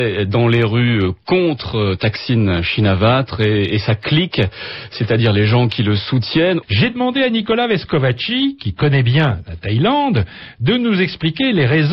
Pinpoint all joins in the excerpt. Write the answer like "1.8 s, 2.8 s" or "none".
6.6 s

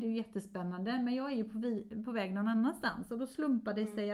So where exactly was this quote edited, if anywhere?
none

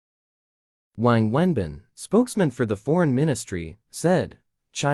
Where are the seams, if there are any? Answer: none

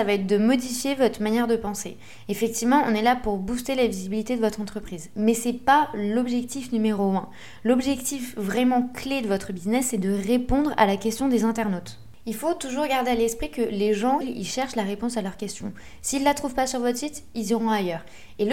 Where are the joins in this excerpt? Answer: 14.2 s

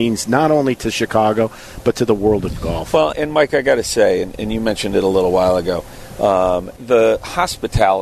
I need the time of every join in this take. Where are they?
3.1 s, 6.8 s

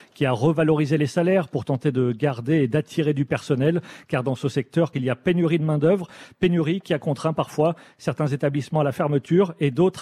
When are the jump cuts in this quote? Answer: 4.9 s

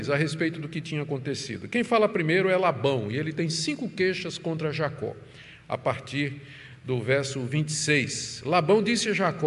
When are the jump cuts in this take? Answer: none

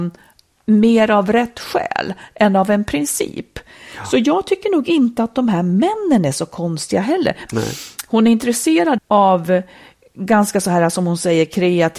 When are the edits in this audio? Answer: 7.5 s, 9.0 s

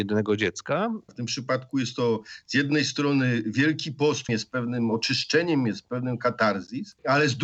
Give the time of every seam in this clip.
1.1 s, 4.3 s

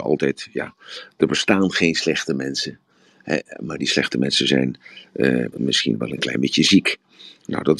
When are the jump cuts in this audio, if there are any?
5.5 s

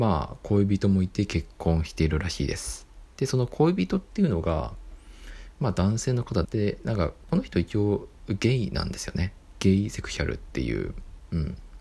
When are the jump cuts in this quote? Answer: 6.4 s

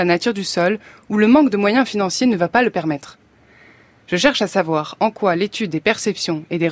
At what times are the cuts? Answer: 4.0 s

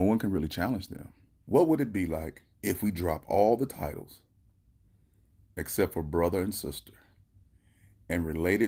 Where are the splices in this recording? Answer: 1.4 s, 2.5 s

